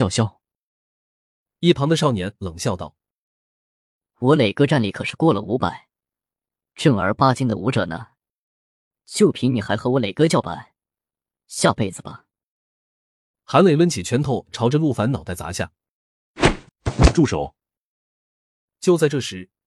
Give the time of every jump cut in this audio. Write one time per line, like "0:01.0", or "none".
none